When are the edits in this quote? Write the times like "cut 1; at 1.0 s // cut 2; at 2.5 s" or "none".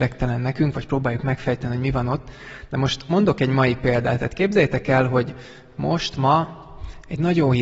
none

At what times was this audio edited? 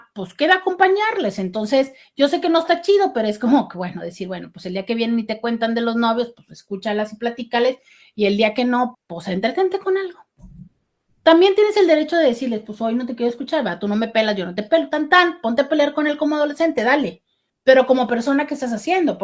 cut 1; at 8.9 s

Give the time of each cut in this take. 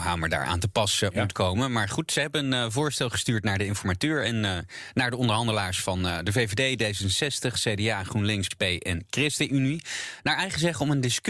cut 1; at 8.5 s

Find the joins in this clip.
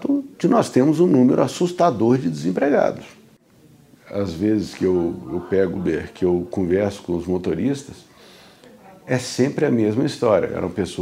cut 1; at 3.9 s // cut 2; at 5.8 s

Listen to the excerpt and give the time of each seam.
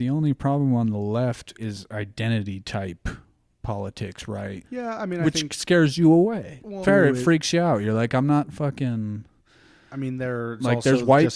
cut 1; at 1.6 s // cut 2; at 4.6 s // cut 3; at 6.8 s

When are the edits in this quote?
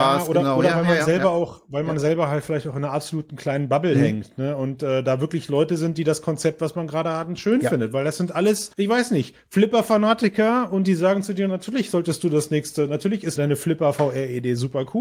cut 1; at 8.7 s // cut 2; at 13.4 s

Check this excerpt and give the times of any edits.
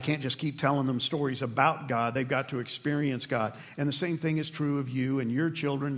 none

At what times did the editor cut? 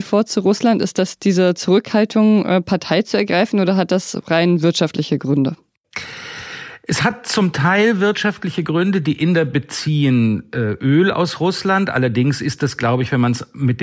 none

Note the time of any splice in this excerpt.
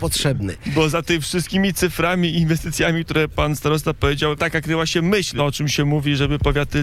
cut 1; at 4.4 s // cut 2; at 5.4 s

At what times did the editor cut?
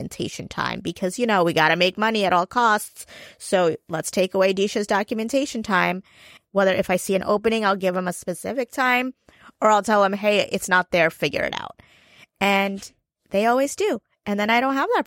cut 1; at 6.4 s

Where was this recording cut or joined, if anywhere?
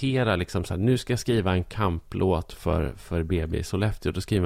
none

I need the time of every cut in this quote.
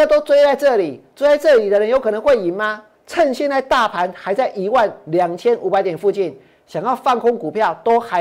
cut 1; at 2.9 s

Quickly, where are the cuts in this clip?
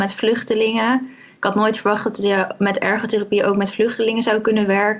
none

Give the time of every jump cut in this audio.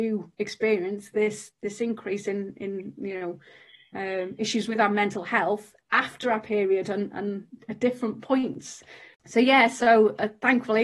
none

